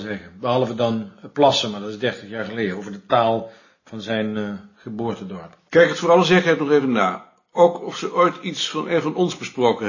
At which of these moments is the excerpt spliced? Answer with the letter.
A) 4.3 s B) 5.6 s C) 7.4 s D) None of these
D